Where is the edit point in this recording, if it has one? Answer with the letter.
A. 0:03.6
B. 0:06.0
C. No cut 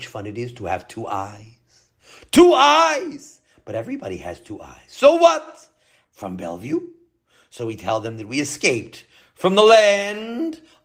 B